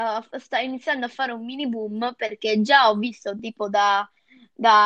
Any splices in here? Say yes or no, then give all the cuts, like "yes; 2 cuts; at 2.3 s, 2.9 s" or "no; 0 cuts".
no; 0 cuts